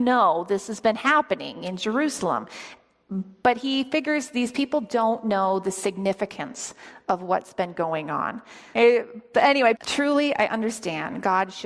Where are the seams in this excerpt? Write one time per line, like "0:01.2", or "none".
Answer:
0:08.7
0:09.8